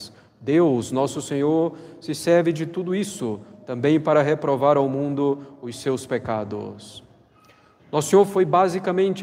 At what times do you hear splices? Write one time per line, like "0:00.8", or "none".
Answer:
0:07.8